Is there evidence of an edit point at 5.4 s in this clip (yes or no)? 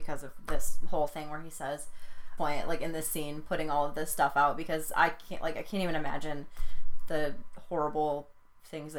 no